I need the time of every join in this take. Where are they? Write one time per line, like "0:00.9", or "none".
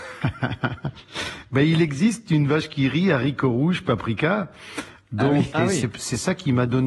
0:05.5

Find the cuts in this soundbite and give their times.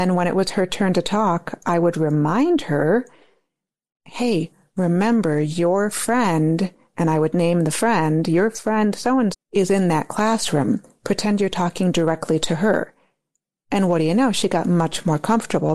0:09.3

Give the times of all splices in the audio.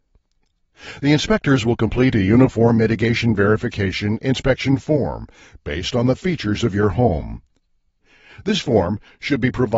none

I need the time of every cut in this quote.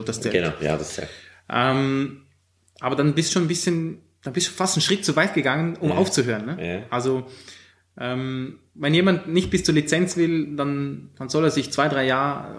none

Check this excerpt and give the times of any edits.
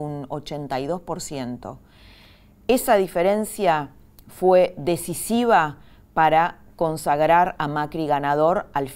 none

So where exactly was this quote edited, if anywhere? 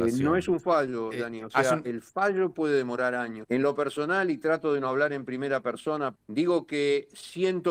0:01.1
0:03.4
0:06.2

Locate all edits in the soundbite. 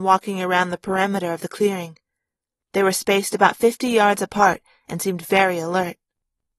none

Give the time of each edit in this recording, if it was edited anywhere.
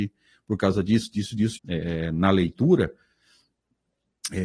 0:01.6

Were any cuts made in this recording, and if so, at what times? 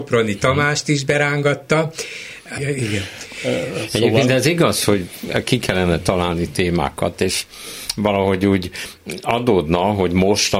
0:02.6

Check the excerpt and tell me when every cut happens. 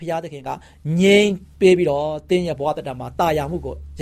0:01.5

